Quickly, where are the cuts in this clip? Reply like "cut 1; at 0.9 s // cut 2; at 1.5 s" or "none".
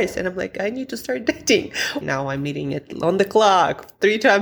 cut 1; at 2.0 s